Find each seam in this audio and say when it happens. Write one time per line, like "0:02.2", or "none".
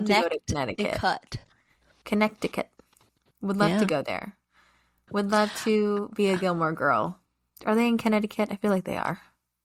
none